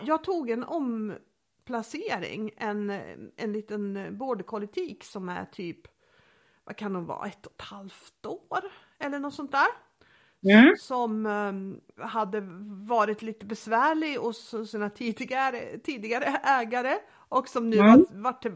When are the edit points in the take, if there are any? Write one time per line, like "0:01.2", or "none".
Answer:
0:12.0